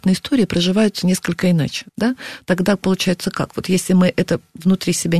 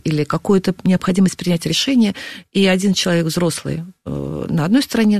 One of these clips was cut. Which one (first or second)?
first